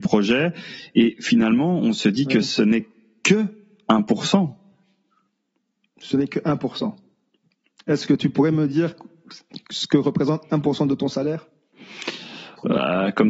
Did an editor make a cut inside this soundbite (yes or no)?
no